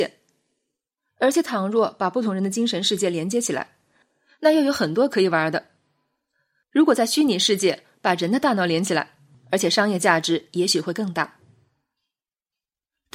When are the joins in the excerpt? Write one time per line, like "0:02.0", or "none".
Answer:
0:06.6
0:09.3

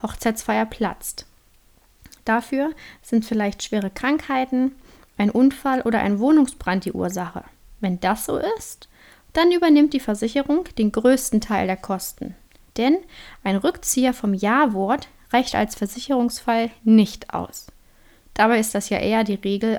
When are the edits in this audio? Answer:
0:12.7

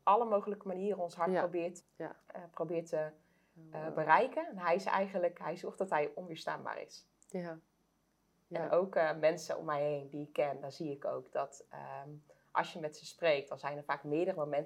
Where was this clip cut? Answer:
0:01.8

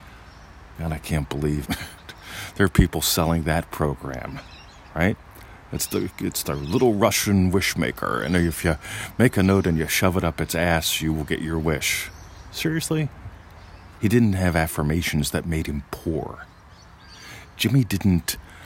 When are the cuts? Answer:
0:01.6
0:14.0

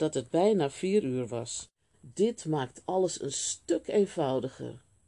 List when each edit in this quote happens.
0:01.9

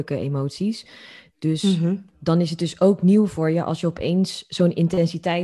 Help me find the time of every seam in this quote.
none

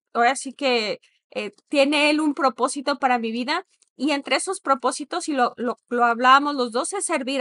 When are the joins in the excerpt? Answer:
none

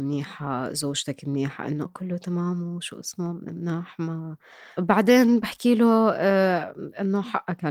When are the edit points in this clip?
0:01.9

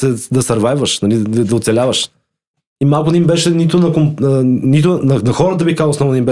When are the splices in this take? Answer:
0:02.6

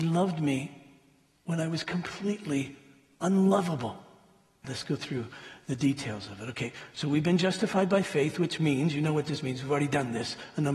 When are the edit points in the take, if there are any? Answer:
0:04.6

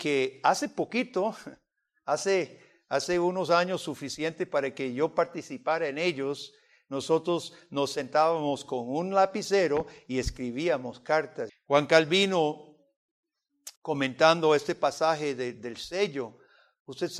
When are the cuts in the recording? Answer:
0:11.5
0:13.8

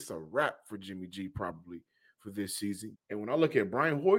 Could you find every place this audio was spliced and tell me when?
0:02.9

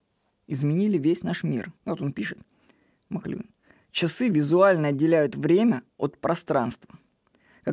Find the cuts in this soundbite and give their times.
0:01.8

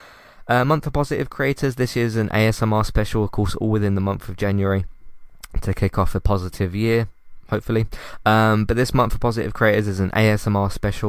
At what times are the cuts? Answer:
none

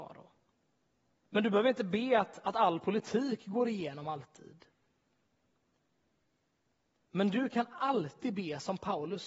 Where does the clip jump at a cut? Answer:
0:01.2

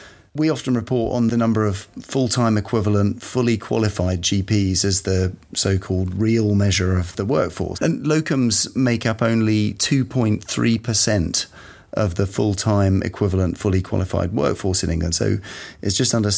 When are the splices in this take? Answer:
0:07.7

